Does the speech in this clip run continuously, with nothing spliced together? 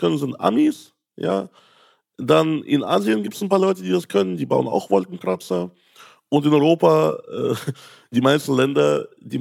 yes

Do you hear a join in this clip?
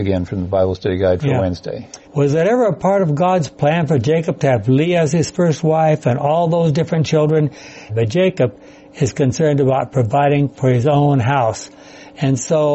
yes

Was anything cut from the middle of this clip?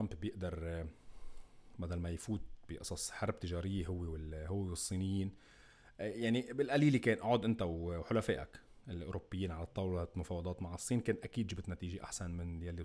no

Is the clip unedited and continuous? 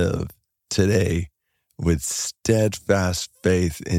yes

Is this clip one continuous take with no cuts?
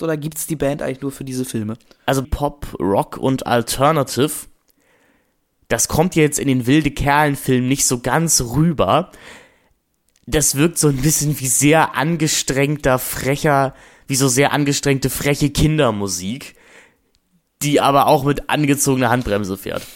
no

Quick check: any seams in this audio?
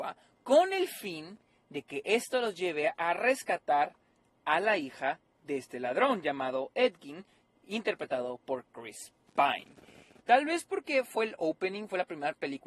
yes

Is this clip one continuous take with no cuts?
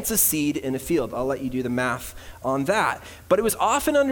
yes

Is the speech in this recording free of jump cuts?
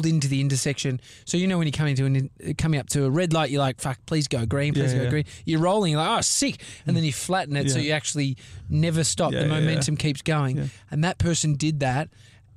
yes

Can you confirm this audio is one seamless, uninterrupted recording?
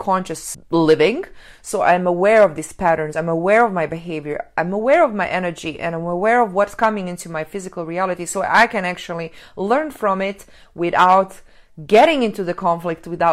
yes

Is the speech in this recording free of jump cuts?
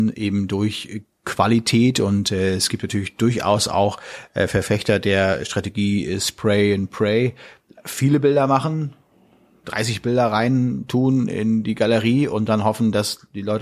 yes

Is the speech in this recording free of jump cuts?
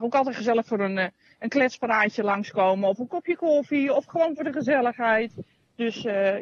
yes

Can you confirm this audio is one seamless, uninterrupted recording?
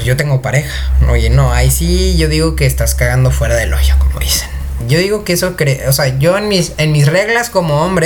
no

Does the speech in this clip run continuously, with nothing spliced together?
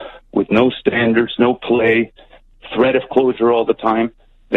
yes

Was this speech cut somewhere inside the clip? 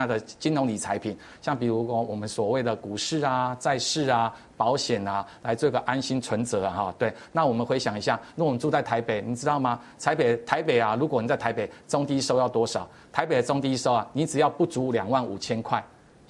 no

